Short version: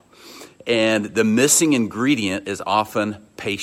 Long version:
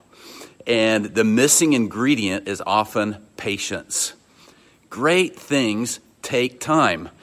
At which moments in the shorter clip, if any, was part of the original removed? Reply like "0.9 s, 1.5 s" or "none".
none